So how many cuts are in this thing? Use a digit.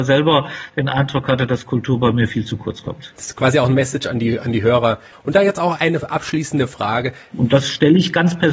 2